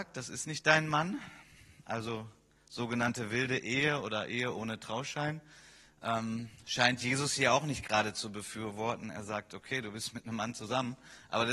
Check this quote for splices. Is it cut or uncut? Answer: uncut